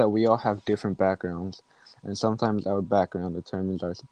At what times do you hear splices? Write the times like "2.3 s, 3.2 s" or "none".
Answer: none